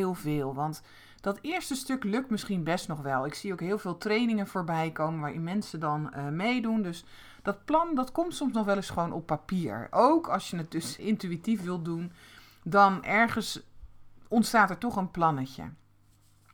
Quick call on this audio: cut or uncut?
cut